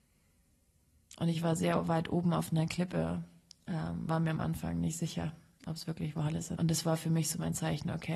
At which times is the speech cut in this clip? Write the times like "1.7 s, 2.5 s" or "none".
4.1 s, 6.6 s